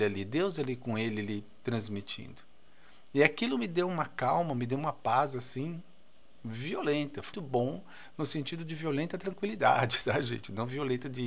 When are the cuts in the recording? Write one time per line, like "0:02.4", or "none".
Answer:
0:07.3